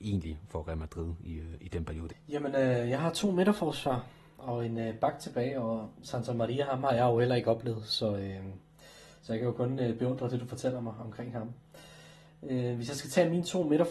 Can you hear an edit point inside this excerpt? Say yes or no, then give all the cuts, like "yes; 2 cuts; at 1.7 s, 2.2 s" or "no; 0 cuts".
yes; 1 cut; at 2.1 s